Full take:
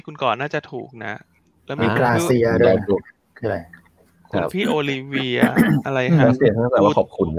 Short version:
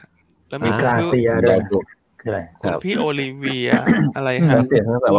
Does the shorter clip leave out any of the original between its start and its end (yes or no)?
yes